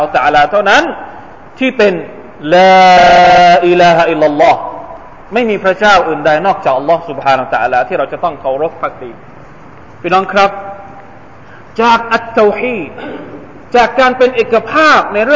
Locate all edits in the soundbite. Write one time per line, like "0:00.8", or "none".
none